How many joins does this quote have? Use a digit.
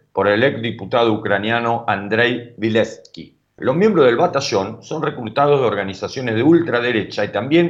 1